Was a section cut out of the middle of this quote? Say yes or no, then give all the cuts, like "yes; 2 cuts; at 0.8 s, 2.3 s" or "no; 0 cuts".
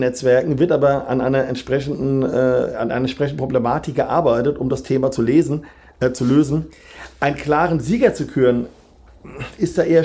no; 0 cuts